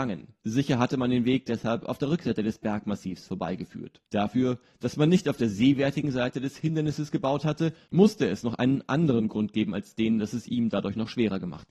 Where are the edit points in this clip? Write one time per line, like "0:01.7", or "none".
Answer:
none